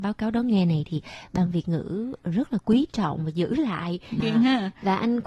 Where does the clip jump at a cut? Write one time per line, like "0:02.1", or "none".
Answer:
0:04.2